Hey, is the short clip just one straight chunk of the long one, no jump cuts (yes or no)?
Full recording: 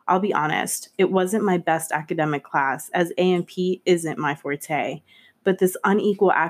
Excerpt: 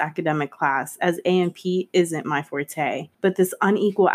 no